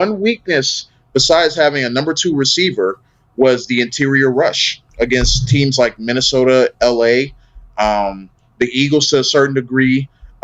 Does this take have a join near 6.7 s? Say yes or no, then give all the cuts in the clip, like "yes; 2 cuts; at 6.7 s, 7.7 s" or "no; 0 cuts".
yes; 1 cut; at 6.7 s